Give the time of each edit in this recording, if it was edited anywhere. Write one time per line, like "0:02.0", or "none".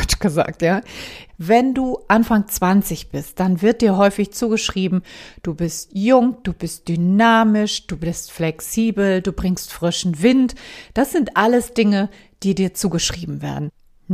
0:01.3